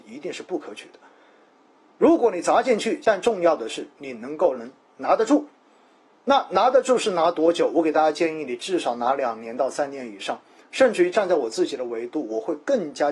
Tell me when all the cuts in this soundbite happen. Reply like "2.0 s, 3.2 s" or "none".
3.0 s

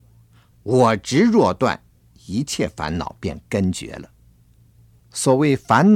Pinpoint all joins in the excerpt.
5.0 s

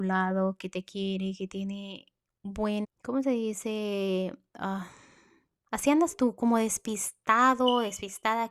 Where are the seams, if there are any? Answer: 2.8 s

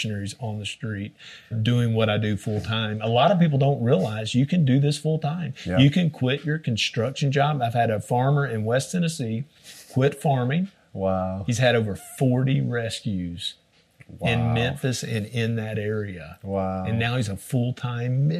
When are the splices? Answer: 1.5 s

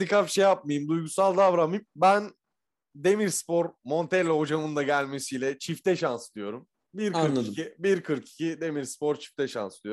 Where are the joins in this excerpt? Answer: 1.9 s

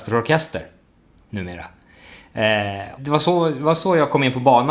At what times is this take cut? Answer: 3.0 s

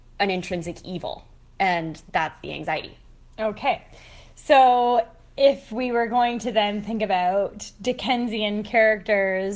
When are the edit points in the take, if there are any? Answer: none

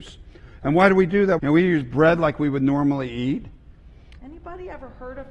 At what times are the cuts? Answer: 1.4 s, 4.2 s

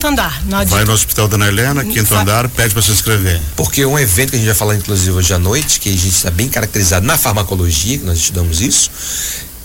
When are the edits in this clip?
3.5 s

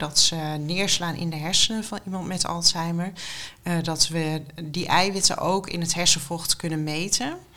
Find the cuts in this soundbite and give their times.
none

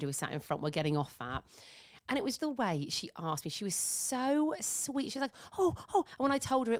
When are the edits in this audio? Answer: 2.4 s

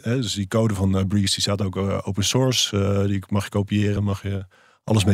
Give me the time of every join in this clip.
4.0 s

